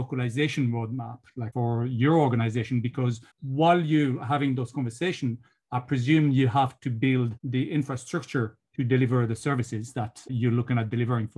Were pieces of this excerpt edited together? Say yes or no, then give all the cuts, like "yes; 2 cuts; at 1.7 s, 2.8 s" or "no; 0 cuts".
yes; 1 cut; at 3.3 s